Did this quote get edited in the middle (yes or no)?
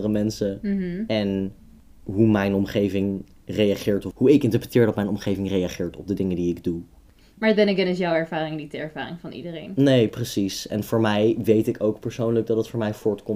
no